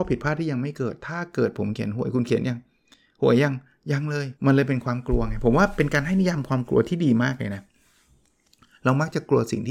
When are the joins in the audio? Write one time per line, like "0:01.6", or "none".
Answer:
0:04.4